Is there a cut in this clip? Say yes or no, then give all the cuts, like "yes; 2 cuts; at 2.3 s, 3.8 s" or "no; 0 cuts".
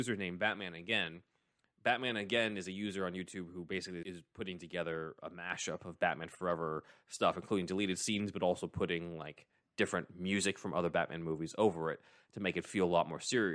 yes; 1 cut; at 4.0 s